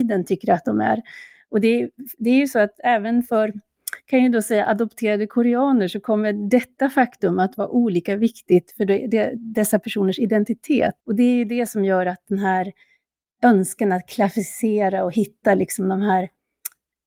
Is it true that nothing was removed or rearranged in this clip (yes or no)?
no